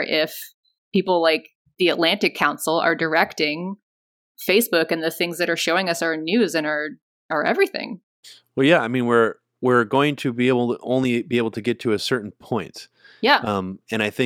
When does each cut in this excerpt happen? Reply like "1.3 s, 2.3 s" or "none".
none